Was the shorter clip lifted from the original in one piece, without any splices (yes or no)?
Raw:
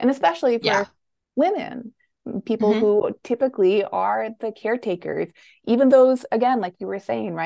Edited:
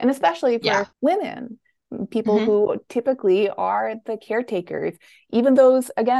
no